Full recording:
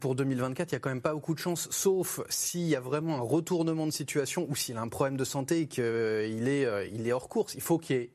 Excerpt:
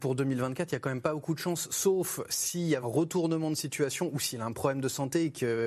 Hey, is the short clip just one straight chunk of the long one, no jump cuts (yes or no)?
no